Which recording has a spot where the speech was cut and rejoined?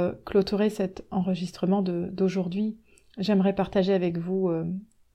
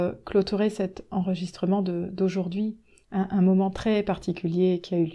second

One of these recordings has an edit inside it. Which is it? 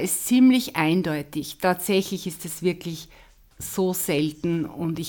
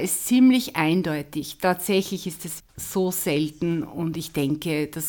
second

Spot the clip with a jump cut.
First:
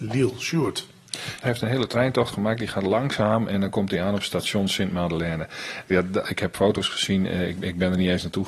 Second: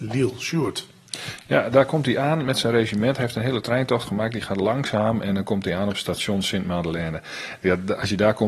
first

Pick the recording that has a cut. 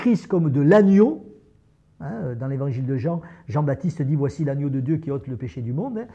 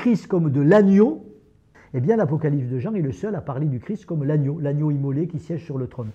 second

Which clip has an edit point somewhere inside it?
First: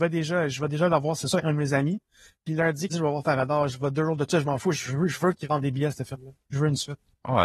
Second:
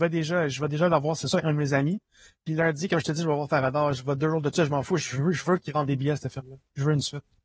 first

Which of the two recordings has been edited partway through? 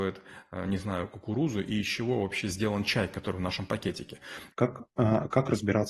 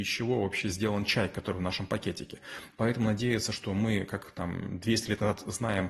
first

